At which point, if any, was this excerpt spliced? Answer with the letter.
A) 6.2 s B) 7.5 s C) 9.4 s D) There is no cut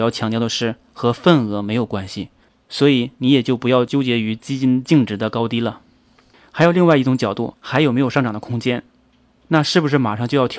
B